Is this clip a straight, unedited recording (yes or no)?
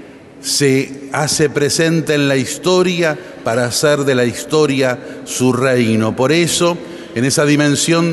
yes